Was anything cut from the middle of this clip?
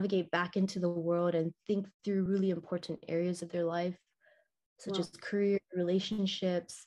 no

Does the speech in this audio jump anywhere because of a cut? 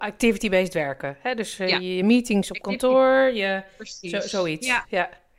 no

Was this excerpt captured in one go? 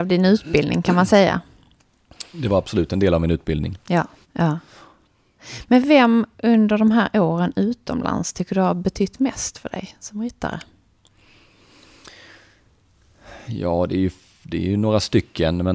no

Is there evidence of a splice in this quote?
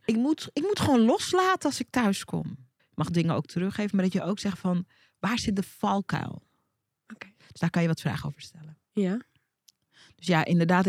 yes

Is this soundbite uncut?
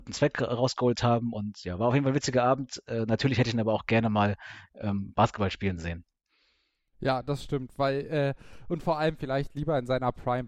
yes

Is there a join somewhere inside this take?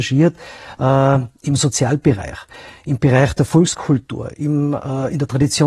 no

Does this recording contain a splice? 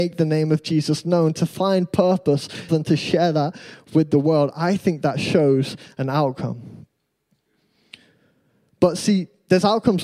yes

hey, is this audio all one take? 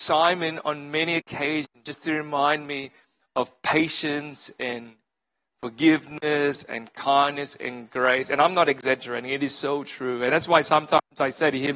yes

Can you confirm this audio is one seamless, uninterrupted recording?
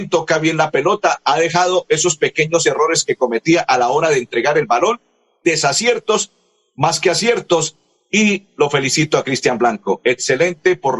yes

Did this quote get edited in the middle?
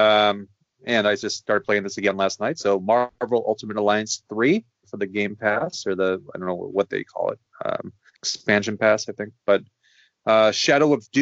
yes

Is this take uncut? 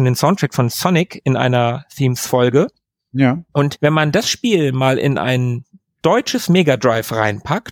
yes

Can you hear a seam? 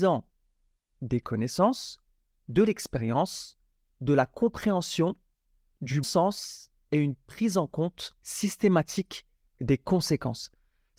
yes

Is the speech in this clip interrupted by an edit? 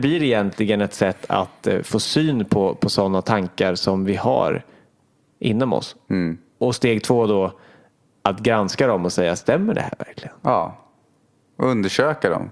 no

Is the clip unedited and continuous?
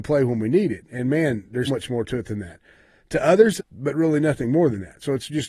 no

